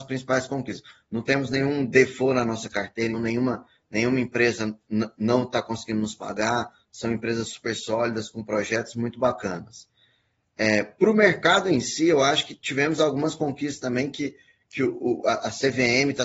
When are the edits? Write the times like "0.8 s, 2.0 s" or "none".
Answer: 3.1 s